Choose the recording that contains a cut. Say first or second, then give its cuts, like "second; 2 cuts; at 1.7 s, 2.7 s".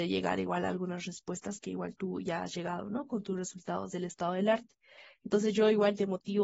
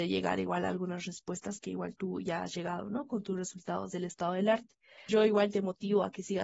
second; 1 cut; at 5.1 s